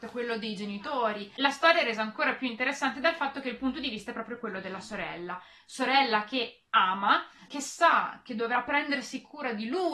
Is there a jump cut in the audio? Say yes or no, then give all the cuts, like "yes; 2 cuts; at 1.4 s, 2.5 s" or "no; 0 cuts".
yes; 1 cut; at 7.5 s